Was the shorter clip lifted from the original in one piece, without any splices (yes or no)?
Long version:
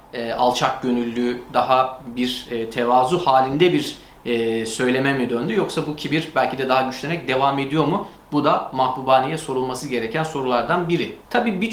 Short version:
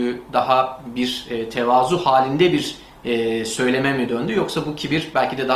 yes